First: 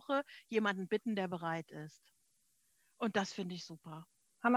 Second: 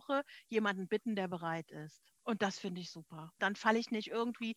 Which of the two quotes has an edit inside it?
second; 2 cuts; at 2.2 s, 3.4 s

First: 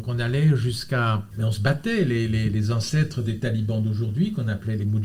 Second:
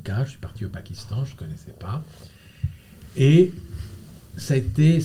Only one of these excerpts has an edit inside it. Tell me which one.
first; 1 cut; at 1.3 s

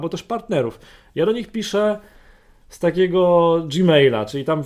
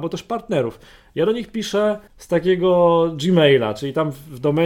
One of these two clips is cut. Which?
second; 1 cut; at 2.1 s

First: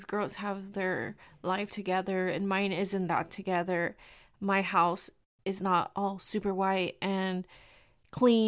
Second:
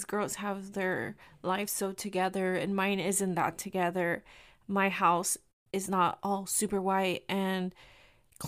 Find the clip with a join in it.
first; 1 cut; at 1.7 s

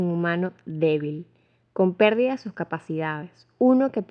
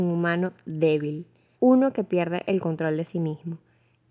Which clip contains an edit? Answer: second; 1 cut; at 1.5 s

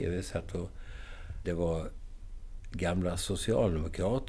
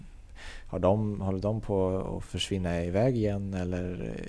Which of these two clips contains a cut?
first; 1 cut; at 1.4 s

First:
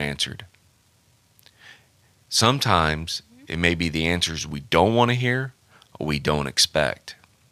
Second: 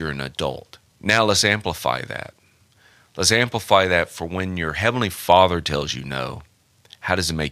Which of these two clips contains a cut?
second; 1 cut; at 0.9 s

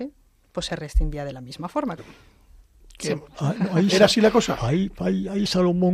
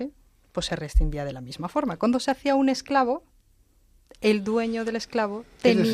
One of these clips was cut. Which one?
first; 2 cuts; at 2.0 s, 3.3 s

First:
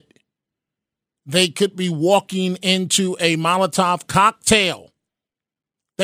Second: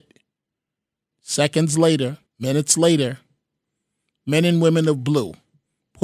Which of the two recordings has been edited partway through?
second; 2 cuts; at 1.1 s, 2.3 s

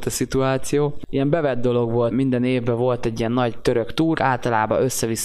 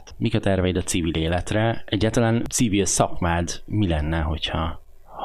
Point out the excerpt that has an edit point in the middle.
first; 2 cuts; at 2.1 s, 4.1 s

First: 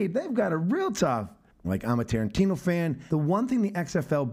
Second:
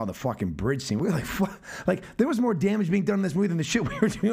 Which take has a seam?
first; 2 cuts; at 1.6 s, 3.1 s

